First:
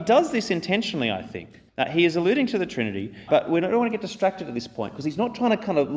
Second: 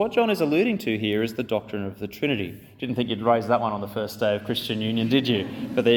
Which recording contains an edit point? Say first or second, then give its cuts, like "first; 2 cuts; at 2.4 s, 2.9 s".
first; 2 cuts; at 1.7 s, 3.3 s